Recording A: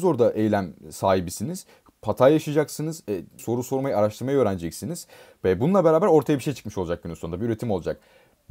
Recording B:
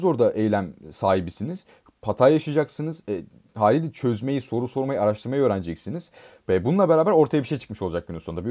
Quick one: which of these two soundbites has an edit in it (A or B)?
A